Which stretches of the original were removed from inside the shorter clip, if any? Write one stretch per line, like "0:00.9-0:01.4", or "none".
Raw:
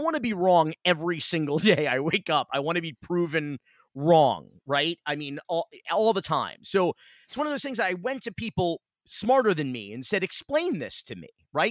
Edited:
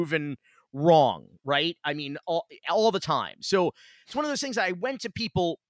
none